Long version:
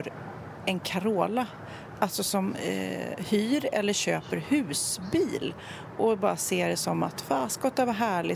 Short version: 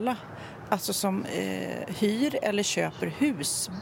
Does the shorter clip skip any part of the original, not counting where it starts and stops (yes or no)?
no